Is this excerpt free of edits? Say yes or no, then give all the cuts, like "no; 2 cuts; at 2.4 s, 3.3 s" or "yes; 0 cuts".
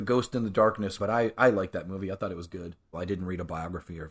no; 2 cuts; at 1.0 s, 2.9 s